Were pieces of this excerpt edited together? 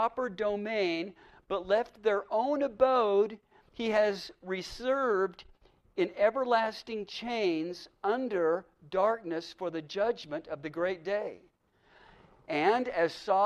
no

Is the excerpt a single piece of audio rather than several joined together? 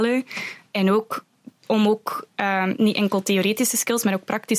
yes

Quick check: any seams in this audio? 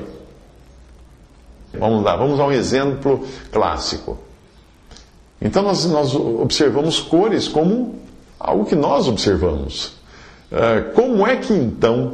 yes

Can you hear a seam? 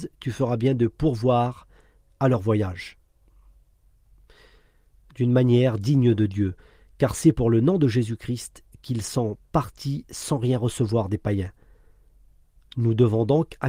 no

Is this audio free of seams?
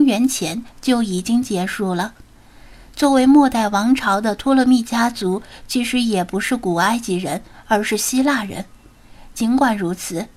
yes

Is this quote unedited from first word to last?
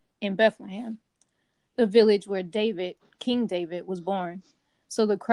yes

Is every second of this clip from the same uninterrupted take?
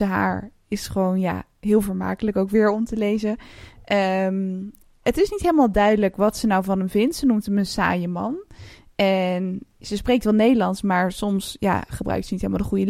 yes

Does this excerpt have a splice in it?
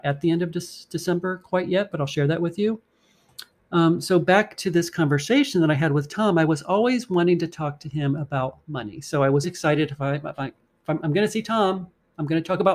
yes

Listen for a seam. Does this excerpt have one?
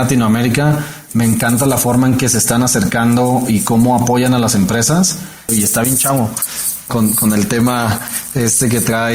yes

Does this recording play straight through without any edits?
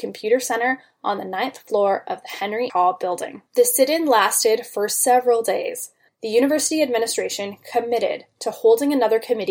no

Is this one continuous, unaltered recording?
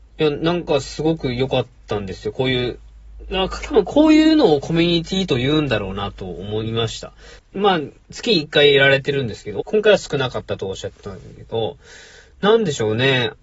no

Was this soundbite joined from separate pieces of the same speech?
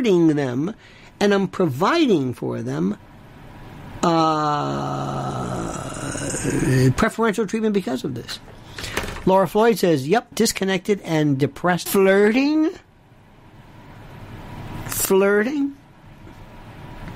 yes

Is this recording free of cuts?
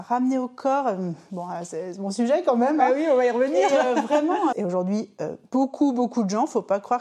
no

